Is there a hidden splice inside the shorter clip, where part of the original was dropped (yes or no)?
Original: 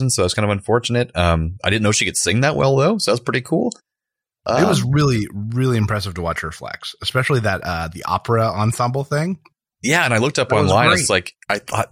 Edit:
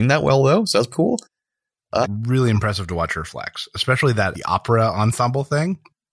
yes